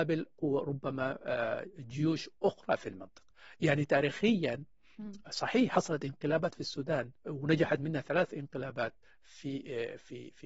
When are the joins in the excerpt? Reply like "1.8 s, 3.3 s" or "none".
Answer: 7.2 s